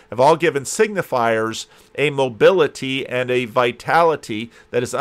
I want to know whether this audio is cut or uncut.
uncut